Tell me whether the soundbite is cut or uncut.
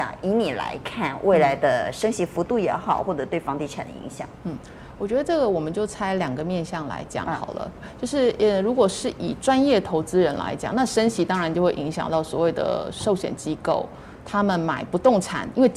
cut